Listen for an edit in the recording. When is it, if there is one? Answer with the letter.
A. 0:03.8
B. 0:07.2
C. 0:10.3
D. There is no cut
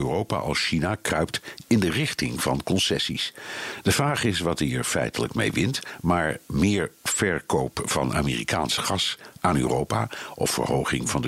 C